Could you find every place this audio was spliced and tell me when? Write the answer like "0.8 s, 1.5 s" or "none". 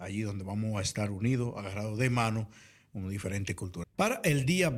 3.8 s